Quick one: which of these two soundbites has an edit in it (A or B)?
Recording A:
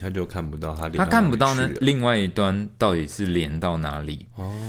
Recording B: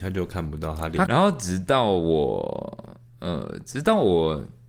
B